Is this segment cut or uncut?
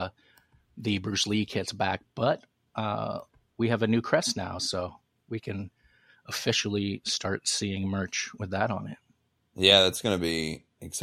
uncut